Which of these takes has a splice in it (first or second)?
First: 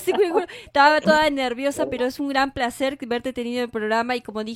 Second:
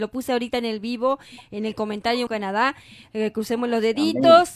second